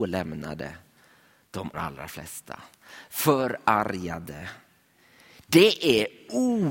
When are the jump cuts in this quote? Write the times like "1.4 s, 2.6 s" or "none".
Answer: 1.7 s

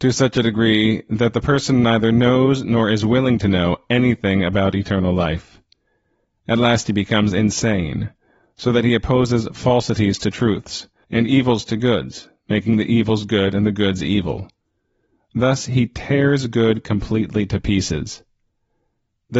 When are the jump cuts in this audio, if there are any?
11.0 s

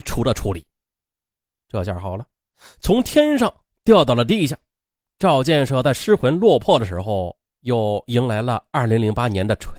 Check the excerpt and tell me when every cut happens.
none

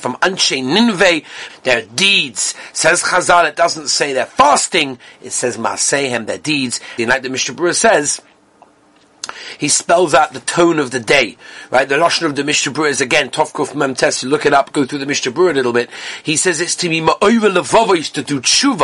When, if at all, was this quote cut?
1.5 s, 7.0 s

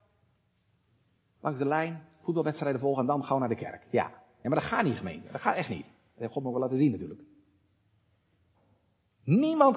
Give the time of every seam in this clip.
none

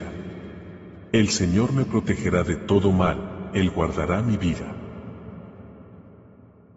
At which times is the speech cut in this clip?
1.1 s

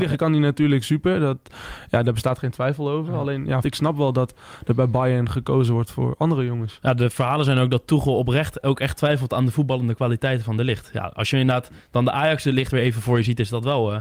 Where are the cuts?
3.6 s

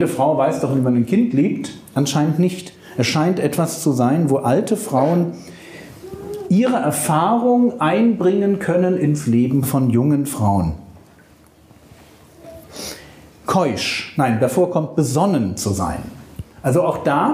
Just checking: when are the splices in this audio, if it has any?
none

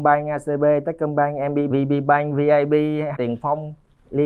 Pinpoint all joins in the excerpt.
1.7 s, 3.1 s

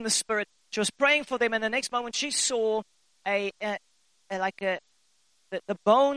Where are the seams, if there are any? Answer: none

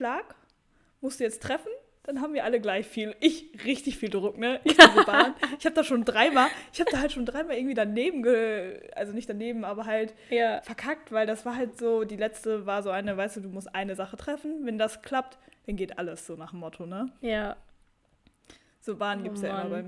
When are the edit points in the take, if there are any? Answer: none

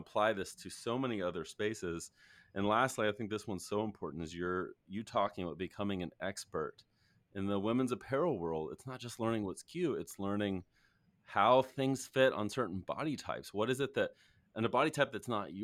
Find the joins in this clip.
none

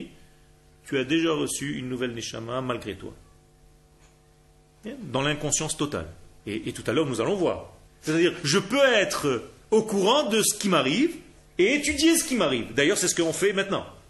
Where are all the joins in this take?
6.4 s, 7.9 s

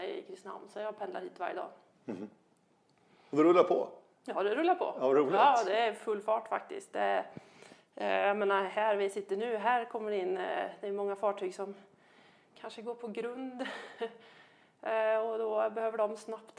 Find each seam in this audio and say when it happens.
none

